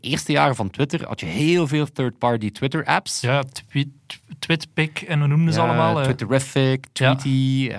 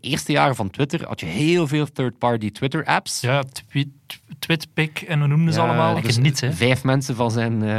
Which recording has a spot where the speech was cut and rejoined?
second; 1 cut; at 6.0 s

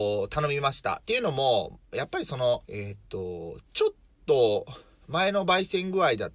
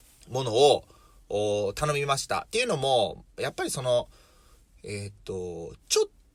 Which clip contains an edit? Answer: first; 1 cut; at 2.6 s

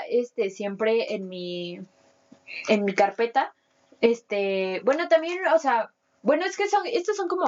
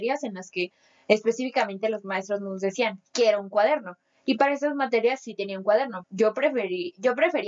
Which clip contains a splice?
second; 1 cut; at 6.0 s

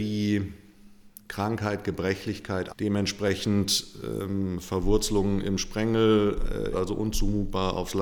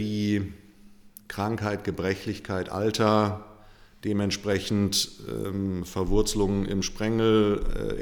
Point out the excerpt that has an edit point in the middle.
first; 2 cuts; at 2.7 s, 6.7 s

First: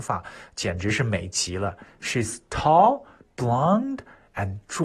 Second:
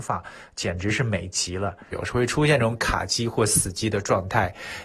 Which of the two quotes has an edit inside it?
second; 1 cut; at 1.9 s

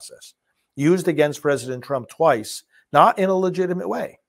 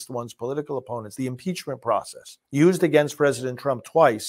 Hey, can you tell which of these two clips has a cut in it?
second; 2 cuts; at 1.2 s, 2.4 s

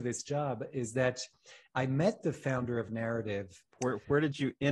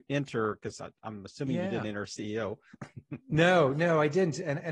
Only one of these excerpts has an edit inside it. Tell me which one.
first; 1 cut; at 3.7 s

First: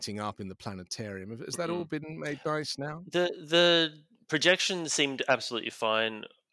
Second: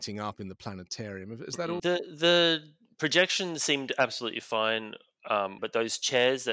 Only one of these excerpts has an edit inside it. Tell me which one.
second; 2 cuts; at 1.8 s, 5.6 s

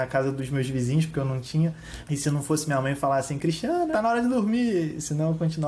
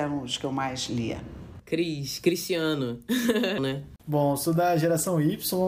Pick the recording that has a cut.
second; 1 cut; at 3.6 s

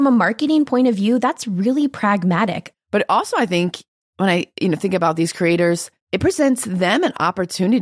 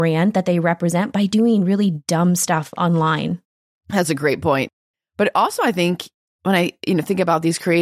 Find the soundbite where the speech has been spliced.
first; 2 cuts; at 2.7 s, 6.0 s

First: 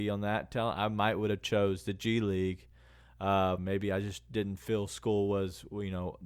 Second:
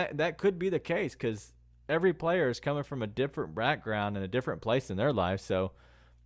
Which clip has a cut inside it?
first; 1 cut; at 3.6 s

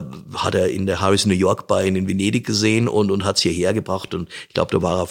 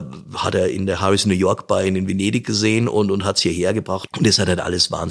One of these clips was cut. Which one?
second; 1 cut; at 4.1 s

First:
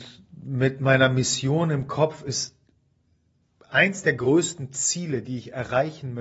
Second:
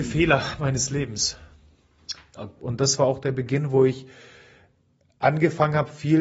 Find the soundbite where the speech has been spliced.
second; 1 cut; at 2.6 s

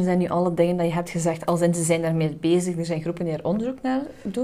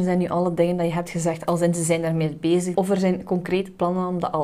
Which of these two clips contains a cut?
second; 1 cut; at 2.7 s

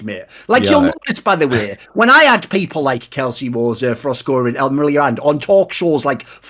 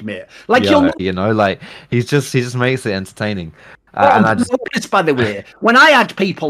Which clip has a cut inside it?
second; 2 cuts; at 1.0 s, 4.7 s

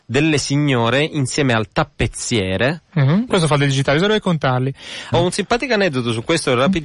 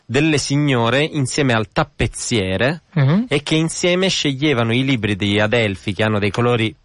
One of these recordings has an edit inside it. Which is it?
first; 2 cuts; at 3.3 s, 5.1 s

